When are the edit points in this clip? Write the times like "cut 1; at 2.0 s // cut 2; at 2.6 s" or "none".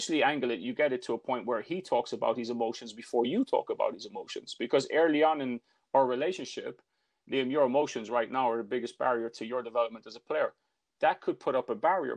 cut 1; at 7.2 s